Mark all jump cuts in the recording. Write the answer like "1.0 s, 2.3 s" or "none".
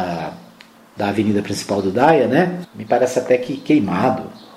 2.6 s